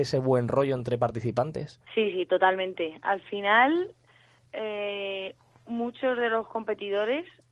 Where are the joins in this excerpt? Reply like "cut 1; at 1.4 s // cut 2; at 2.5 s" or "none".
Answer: cut 1; at 1.8 s